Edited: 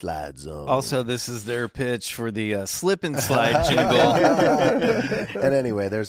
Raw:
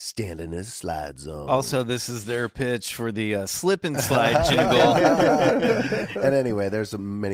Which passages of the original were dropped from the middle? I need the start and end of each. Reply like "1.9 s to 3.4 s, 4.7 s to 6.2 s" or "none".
none